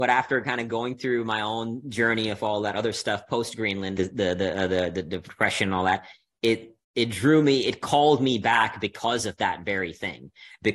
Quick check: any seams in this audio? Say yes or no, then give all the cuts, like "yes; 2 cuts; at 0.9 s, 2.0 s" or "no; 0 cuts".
yes; 2 cuts; at 4.0 s, 6.8 s